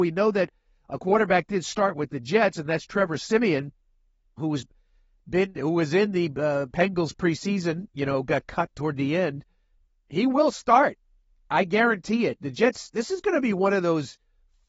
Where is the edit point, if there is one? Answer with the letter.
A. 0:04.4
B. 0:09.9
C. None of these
A